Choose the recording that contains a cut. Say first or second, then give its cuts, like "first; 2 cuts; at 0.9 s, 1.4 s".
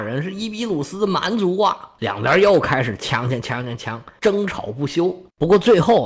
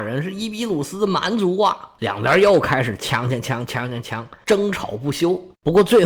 first; 1 cut; at 3.4 s